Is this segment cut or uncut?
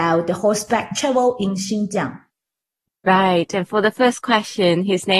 uncut